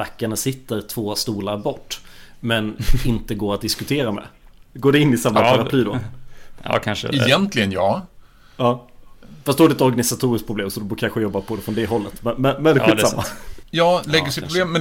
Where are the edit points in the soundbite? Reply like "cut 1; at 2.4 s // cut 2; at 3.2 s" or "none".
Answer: cut 1; at 13.6 s